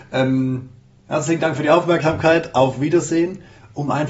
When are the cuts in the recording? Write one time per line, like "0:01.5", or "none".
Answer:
none